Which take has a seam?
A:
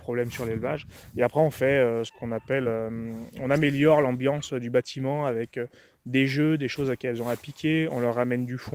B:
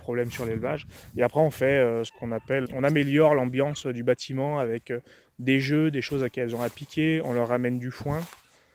B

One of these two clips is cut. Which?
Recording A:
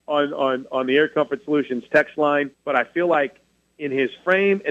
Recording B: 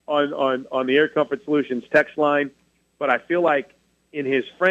A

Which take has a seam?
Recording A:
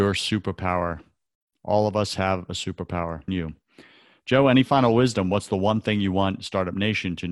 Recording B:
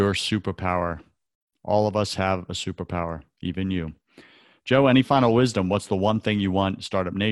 A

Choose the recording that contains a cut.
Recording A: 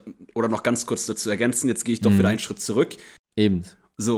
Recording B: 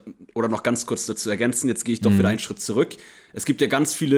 A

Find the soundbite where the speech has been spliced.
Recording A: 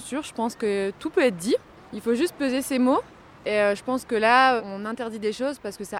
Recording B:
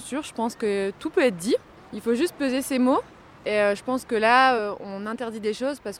A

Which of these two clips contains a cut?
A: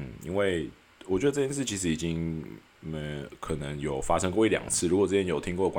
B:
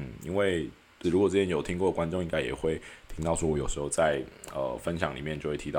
B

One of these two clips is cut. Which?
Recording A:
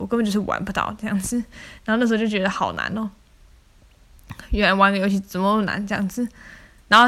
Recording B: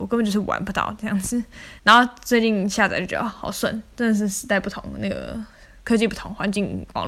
B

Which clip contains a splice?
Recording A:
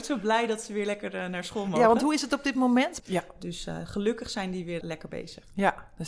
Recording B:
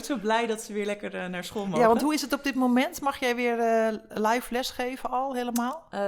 A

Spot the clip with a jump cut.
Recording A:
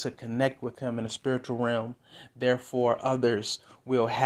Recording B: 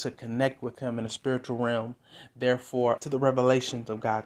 B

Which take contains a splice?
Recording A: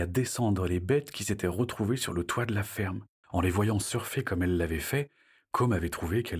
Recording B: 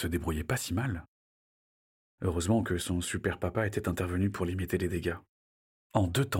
A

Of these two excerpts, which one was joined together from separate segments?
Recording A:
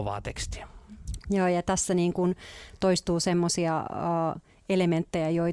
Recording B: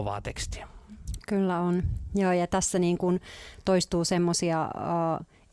A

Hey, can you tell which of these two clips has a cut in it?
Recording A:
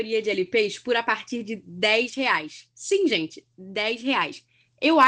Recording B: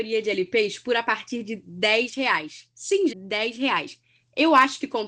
B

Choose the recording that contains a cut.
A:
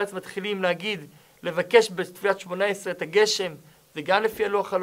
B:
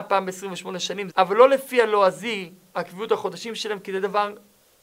B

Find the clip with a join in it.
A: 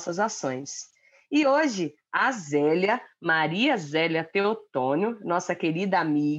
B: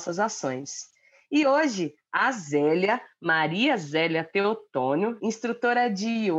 B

